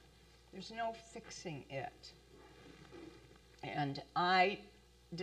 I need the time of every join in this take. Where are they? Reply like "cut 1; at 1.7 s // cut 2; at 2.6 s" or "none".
cut 1; at 3.4 s